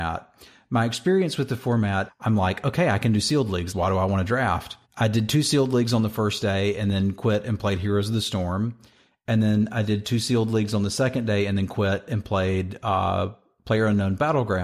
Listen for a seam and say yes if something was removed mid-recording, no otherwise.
yes